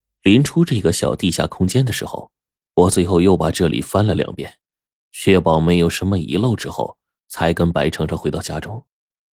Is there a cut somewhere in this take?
no; 0 cuts

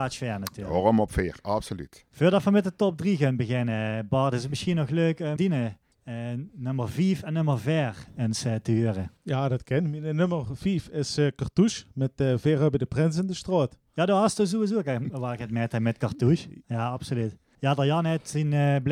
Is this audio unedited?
no; 2 cuts; at 5.4 s, 16.6 s

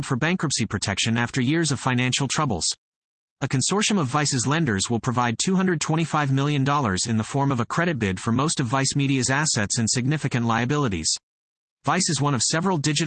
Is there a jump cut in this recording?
no; 0 cuts

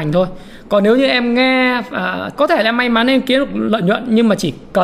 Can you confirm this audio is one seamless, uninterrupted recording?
no; 1 cut; at 2.4 s

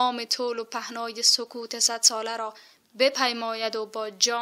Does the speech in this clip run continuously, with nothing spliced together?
yes; 0 cuts

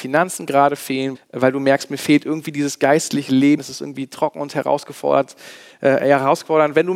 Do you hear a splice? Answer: yes; 2 cuts; at 1.1 s, 3.6 s

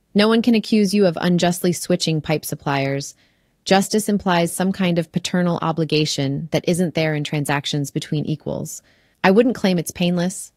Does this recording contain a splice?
yes; 1 cut; at 9.1 s

